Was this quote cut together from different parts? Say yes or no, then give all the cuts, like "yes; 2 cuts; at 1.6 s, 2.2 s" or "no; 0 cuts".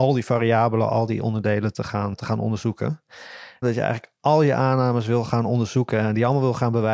yes; 2 cuts; at 2.1 s, 3.6 s